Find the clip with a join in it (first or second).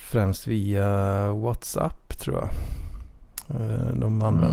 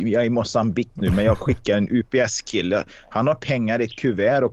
second